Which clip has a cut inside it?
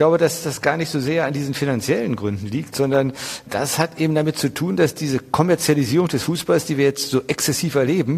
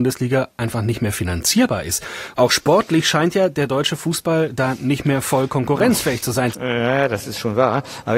second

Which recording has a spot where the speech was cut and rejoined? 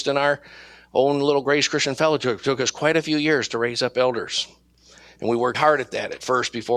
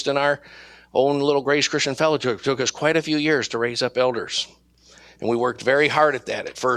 first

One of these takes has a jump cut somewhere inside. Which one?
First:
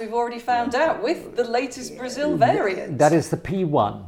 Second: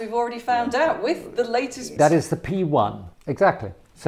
second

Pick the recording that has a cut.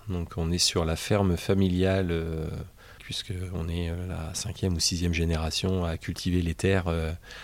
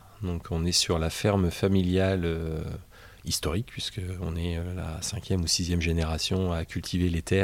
first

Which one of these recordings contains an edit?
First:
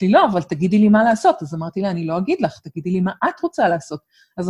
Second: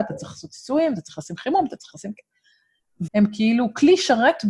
second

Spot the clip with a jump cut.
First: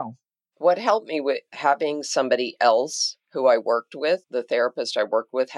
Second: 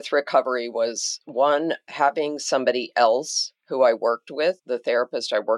first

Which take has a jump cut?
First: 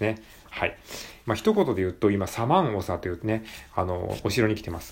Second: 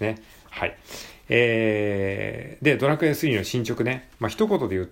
first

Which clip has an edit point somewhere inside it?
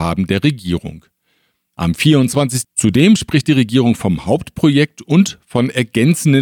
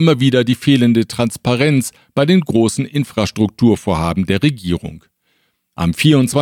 first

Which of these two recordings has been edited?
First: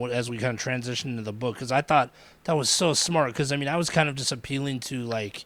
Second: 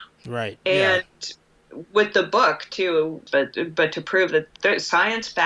second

